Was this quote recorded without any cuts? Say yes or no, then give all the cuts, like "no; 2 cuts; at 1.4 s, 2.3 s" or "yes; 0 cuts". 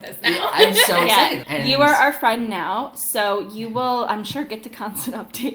no; 1 cut; at 1.4 s